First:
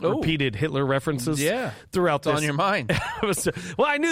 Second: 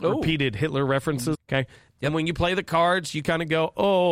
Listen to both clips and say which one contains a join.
second; 1 cut; at 1.3 s

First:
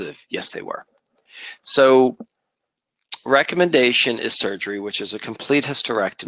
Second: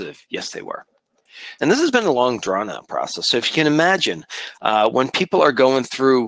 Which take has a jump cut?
second; 1 cut; at 1.6 s

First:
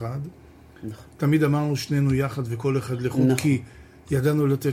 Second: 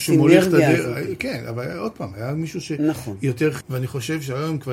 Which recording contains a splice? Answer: second; 1 cut; at 3.6 s

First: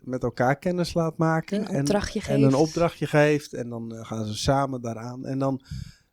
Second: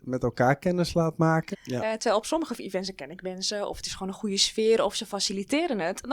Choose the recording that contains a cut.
second; 1 cut; at 1.5 s

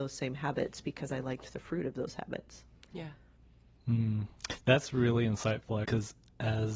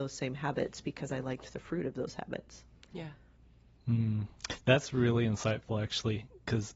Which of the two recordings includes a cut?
first; 1 cut; at 5.8 s

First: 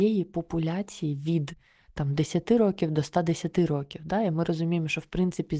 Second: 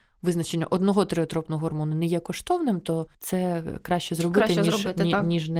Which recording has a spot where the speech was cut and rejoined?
second; 1 cut; at 3.1 s

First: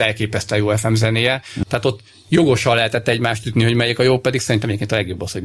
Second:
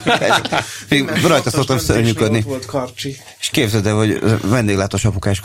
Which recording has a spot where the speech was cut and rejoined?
first; 1 cut; at 1.6 s

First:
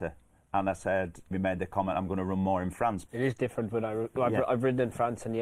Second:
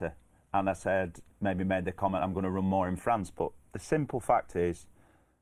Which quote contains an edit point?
first; 2 cuts; at 1.3 s, 3.1 s

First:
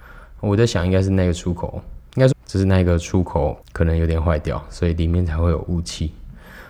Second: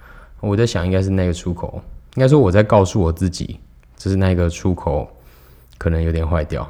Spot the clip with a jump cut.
first; 2 cuts; at 2.3 s, 3.6 s

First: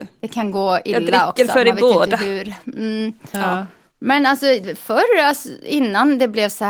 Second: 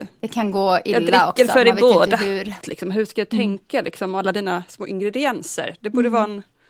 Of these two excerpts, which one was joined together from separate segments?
second; 1 cut; at 2.6 s

